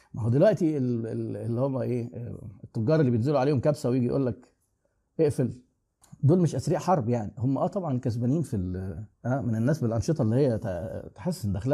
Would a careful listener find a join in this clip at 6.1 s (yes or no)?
no